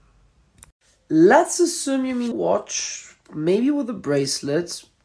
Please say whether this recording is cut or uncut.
cut